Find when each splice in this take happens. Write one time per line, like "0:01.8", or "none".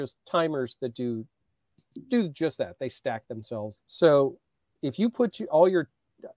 0:03.8